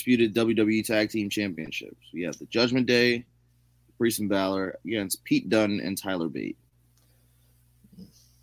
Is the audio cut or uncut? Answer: uncut